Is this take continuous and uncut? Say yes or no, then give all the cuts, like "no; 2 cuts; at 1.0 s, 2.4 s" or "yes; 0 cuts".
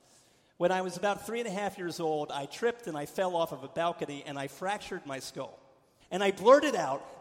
no; 1 cut; at 6.0 s